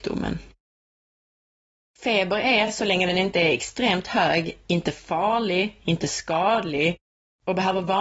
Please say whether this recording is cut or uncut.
uncut